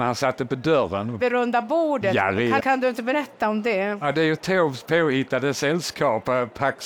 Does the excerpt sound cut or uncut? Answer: cut